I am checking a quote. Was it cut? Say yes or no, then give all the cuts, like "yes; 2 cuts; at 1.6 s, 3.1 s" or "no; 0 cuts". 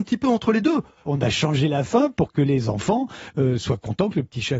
yes; 1 cut; at 1.1 s